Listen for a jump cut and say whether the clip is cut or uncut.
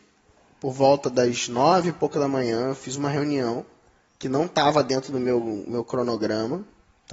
uncut